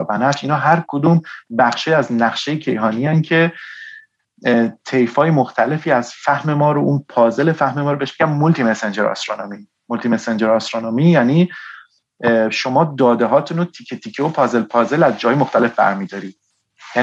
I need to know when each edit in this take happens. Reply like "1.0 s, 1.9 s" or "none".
none

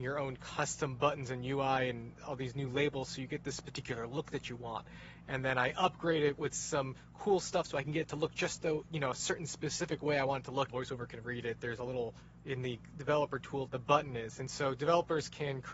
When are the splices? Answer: 5.2 s, 10.7 s, 13.7 s

